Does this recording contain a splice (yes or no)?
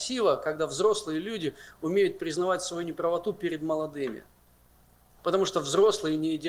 no